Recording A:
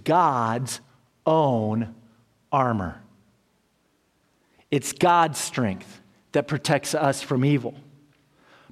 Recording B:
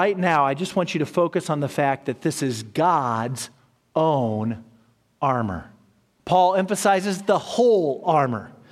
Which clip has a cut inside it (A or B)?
B